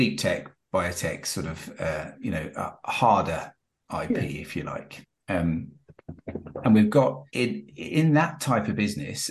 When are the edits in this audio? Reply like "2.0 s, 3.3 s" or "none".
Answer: 7.3 s